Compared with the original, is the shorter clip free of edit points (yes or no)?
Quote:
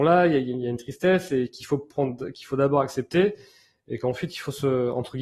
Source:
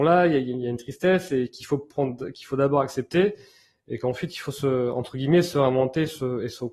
yes